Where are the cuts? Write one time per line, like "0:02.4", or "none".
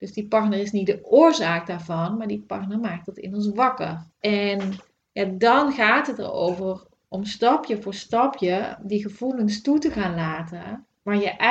0:04.1